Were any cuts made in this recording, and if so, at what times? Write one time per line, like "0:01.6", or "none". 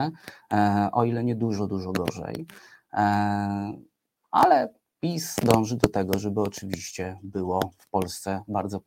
none